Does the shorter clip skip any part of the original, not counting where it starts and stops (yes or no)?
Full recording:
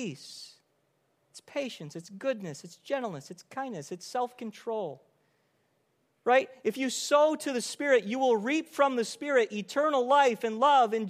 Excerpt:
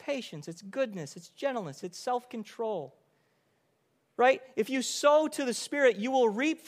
yes